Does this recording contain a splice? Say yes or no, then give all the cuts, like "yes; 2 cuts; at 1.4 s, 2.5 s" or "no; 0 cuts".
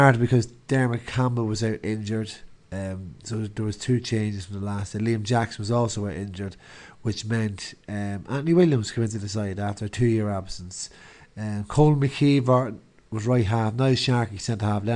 no; 0 cuts